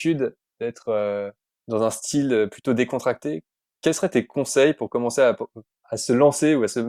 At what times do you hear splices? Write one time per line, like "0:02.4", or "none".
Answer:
0:05.8

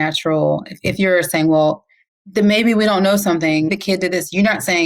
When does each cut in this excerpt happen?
0:03.7

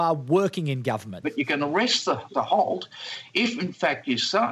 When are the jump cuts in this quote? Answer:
0:01.2
0:02.3

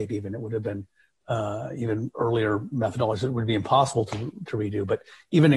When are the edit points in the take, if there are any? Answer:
none

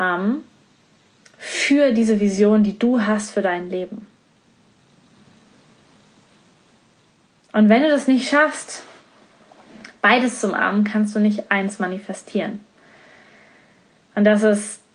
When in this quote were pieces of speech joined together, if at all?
none

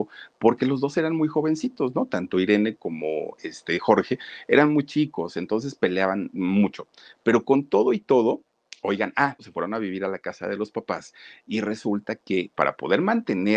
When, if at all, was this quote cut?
0:02.8
0:09.4
0:12.5

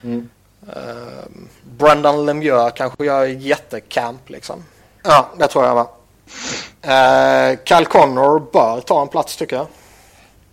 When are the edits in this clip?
0:05.0

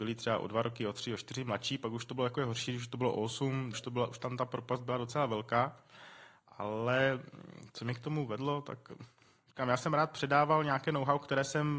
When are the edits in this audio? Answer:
0:03.7

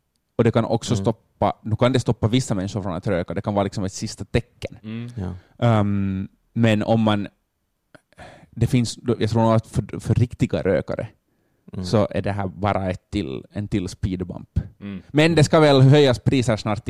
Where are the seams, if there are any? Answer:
none

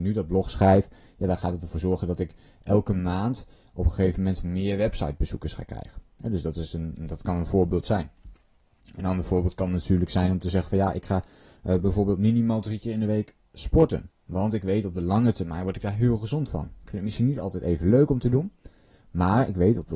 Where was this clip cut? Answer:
none

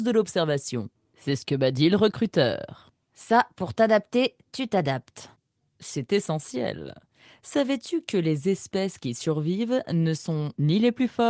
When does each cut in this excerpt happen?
none

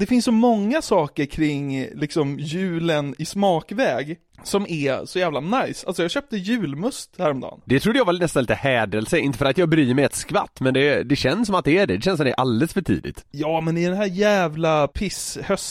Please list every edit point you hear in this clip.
0:07.6

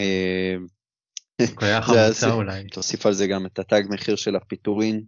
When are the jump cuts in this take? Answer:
0:01.4
0:02.7

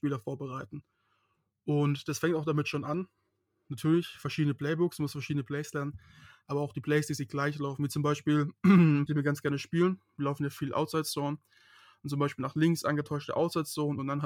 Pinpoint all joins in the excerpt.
0:09.1

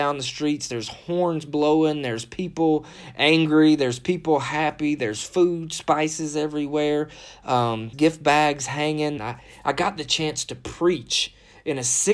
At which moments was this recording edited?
0:07.9
0:09.2

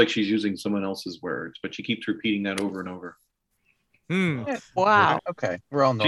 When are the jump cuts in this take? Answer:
0:05.2

